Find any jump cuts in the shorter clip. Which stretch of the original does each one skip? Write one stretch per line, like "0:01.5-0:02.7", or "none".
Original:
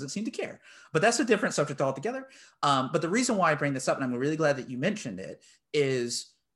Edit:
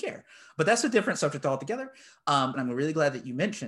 0:02.9-0:04.0